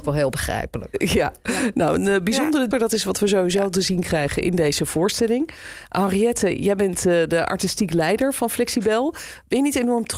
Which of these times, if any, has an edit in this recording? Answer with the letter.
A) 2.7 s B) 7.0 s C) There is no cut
A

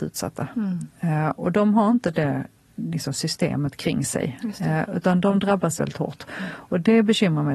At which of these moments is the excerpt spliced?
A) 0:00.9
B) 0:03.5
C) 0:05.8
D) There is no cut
C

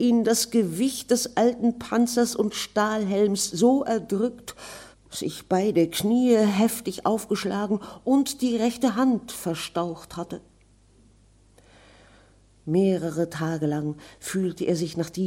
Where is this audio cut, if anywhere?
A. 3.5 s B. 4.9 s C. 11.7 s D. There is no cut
B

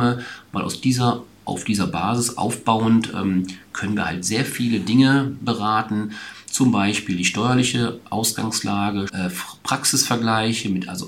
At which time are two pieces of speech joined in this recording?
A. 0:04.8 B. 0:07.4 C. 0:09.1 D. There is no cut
C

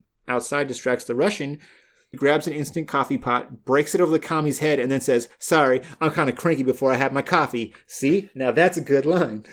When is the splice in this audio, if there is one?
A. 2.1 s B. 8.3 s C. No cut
A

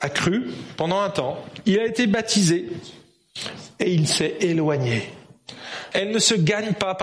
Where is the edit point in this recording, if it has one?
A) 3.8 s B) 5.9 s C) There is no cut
B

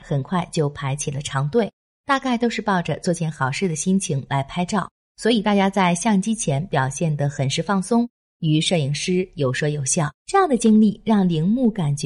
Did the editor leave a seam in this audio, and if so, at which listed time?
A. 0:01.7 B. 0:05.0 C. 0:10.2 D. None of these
C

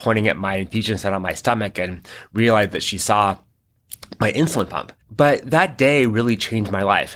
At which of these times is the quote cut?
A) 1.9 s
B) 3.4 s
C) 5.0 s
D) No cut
C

